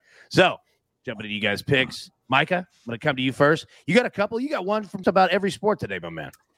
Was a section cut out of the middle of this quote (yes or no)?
yes